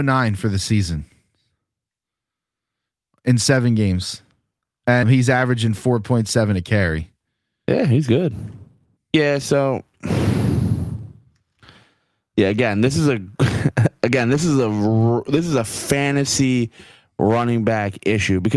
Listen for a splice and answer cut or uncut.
cut